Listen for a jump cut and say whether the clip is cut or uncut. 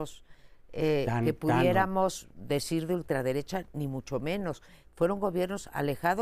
uncut